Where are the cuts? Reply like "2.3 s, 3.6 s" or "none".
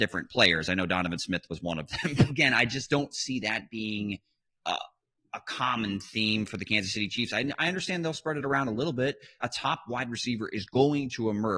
2.3 s, 9.4 s